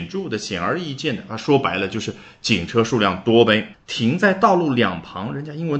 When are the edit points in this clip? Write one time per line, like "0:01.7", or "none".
0:03.7